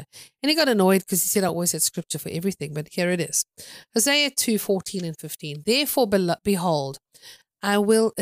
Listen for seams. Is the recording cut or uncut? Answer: uncut